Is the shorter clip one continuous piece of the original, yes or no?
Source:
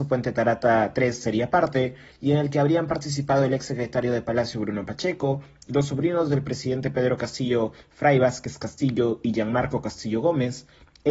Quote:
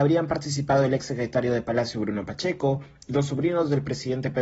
yes